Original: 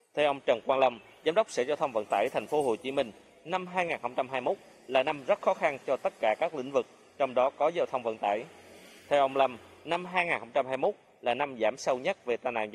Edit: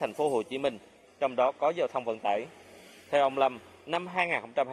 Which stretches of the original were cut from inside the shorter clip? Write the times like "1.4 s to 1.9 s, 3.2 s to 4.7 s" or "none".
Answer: 3.4 s to 7.1 s